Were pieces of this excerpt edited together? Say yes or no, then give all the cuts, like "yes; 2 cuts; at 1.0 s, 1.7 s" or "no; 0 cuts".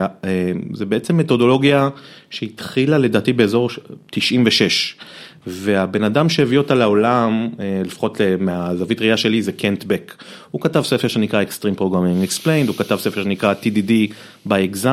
no; 0 cuts